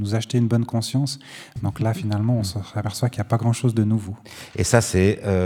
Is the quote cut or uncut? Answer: uncut